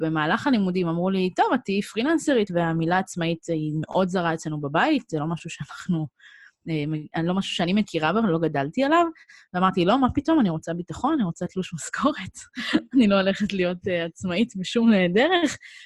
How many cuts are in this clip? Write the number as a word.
one